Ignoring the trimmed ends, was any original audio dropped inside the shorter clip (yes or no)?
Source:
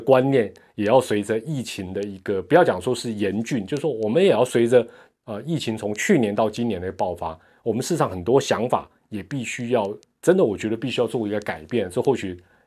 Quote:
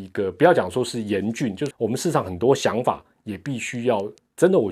yes